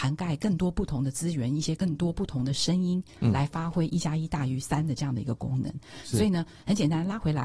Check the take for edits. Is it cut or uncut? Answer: cut